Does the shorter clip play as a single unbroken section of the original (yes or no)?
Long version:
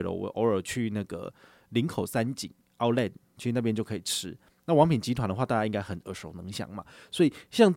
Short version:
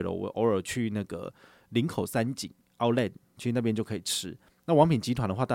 yes